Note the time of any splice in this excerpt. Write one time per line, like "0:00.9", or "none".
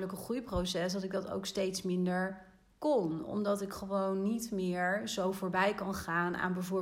none